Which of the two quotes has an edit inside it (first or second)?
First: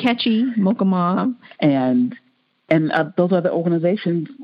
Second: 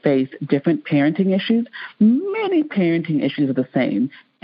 first